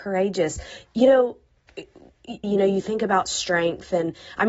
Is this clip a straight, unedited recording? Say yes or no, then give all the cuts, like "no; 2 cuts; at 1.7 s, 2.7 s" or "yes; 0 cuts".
no; 1 cut; at 2.4 s